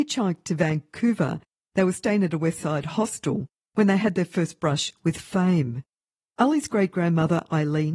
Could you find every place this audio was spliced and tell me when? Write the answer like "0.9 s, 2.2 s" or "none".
1.6 s, 6.3 s

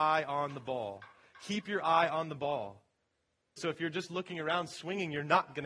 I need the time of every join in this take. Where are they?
3.6 s

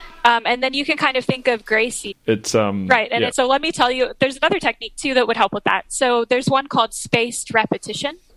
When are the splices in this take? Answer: 2.1 s, 3.3 s

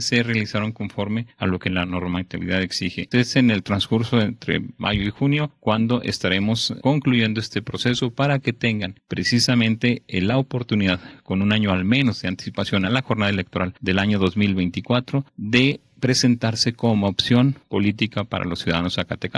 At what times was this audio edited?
3.1 s, 6.8 s

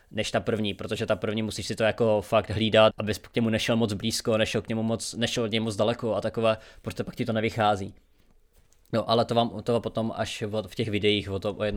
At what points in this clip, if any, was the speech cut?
2.9 s

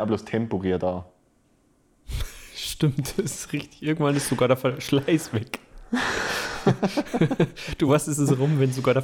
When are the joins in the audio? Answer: none

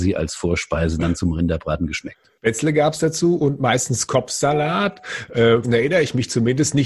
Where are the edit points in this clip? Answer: 5.6 s

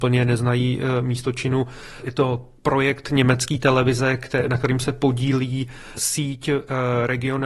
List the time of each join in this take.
2.6 s

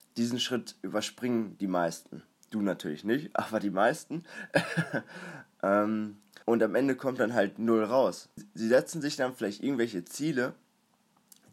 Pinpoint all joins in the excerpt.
6.4 s, 8.4 s

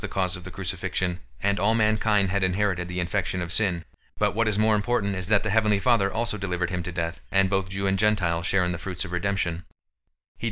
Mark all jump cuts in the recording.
4.1 s

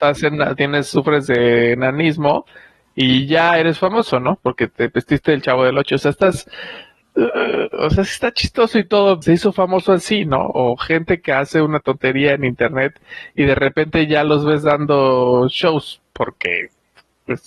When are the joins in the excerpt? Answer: 9.2 s

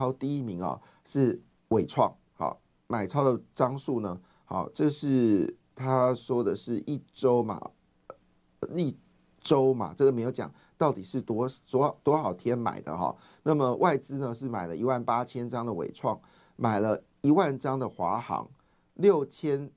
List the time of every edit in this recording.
none

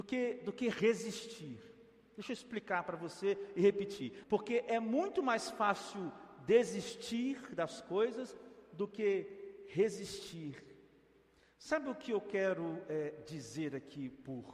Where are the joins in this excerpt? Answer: 4.2 s

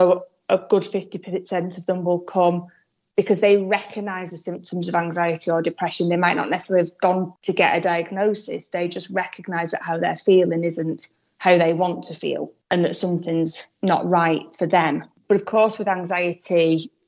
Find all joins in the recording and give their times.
15.2 s

